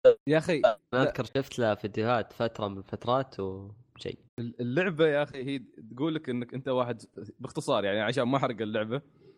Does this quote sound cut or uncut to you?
cut